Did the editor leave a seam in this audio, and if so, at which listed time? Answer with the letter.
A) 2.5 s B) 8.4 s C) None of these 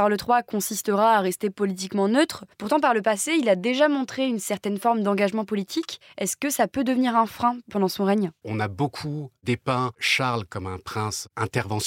B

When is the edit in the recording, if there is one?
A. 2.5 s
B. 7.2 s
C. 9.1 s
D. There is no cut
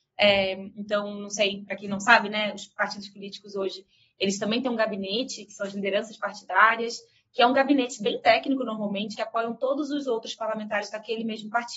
C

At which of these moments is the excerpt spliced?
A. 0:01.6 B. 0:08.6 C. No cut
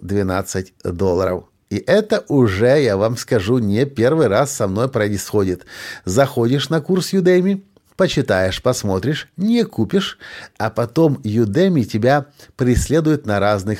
C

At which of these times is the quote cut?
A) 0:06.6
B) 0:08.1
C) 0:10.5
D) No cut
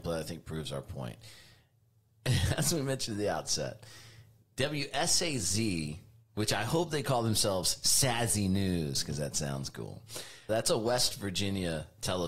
C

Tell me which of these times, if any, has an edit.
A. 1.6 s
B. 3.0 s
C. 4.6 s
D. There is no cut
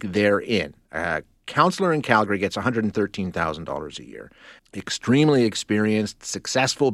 C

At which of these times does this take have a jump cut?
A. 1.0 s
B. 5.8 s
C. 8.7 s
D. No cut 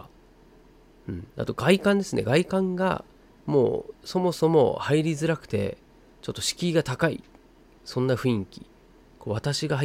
D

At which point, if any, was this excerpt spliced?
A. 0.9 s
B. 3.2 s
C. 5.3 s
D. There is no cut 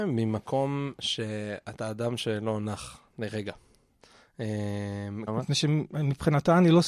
C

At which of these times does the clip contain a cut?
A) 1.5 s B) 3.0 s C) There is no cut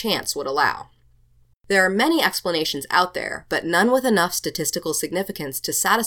A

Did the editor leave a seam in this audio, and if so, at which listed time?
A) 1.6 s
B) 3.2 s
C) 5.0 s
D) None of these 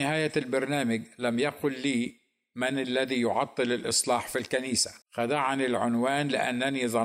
C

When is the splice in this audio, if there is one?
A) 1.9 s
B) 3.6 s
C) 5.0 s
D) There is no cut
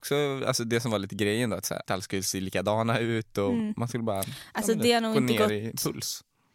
A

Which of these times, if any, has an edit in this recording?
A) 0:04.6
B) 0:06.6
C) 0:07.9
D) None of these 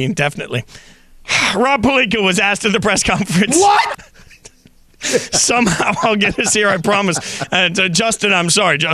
D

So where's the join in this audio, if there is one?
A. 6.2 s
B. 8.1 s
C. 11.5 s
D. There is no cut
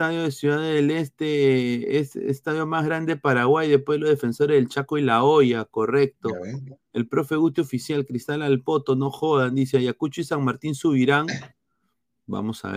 D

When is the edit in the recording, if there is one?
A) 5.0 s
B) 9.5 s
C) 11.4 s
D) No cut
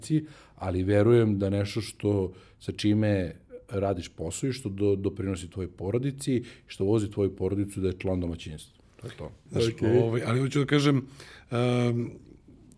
B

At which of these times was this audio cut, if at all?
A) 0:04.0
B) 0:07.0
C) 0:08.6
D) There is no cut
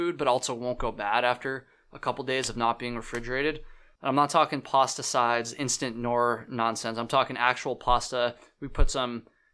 A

